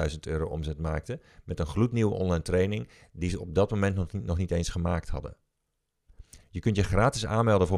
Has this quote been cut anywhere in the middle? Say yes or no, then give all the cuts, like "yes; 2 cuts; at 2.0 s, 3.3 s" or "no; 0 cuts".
yes; 1 cut; at 6.4 s